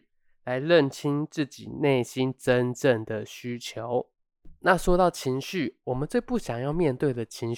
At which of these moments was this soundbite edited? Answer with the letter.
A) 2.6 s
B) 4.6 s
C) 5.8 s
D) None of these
D